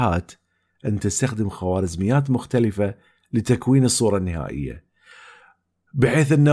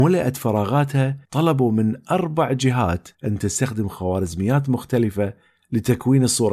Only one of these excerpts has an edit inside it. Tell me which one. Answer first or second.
second